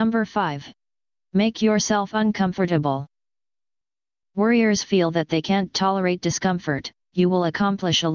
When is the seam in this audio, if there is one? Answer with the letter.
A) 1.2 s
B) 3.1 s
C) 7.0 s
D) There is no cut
C